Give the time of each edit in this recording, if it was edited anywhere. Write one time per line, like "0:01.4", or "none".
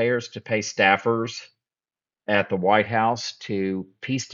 none